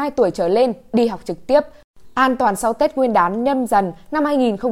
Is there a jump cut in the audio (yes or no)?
no